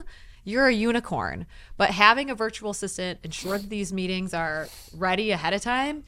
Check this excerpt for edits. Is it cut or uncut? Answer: uncut